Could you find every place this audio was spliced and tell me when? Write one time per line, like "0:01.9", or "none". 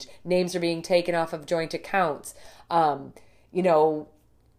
none